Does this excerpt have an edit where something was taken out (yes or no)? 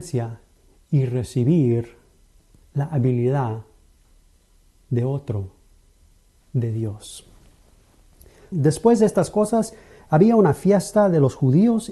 yes